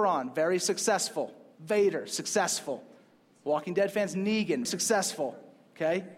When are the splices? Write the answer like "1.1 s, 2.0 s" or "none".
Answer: 4.7 s